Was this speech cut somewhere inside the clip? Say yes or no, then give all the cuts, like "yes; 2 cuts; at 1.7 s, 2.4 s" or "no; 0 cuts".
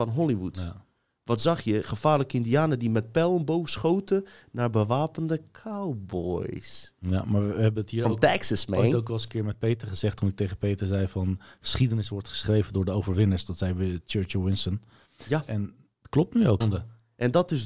yes; 1 cut; at 16.6 s